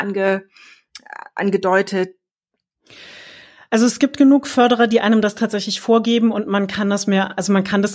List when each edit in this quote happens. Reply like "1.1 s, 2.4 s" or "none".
none